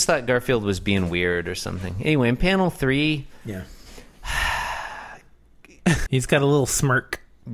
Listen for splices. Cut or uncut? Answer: cut